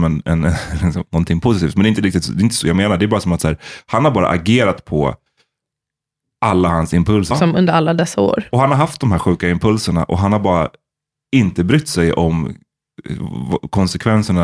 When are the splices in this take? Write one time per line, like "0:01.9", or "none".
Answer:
0:07.3